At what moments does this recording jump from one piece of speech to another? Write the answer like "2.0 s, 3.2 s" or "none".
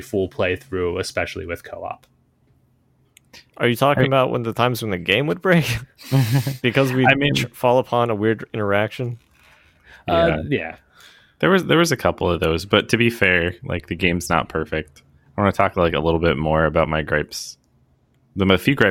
none